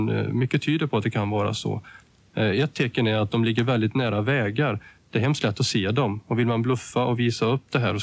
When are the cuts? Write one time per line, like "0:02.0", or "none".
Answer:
none